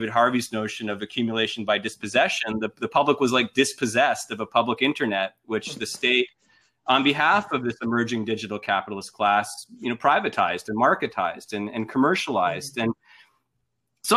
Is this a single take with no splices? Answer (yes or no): yes